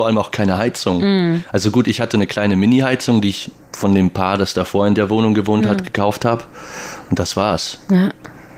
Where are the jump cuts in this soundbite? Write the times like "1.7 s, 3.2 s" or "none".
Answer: none